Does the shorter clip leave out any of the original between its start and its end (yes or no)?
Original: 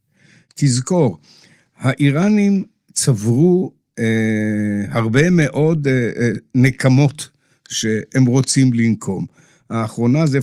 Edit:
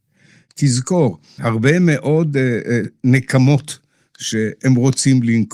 yes